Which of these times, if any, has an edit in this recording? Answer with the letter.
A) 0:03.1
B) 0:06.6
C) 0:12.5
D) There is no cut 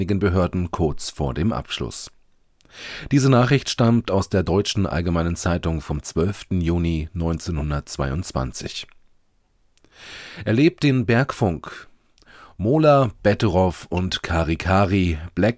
D